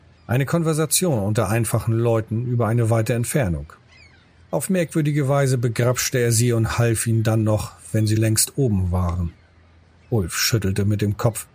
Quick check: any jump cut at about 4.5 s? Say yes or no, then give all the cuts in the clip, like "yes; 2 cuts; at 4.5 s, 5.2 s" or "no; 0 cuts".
yes; 2 cuts; at 4.5 s, 8.2 s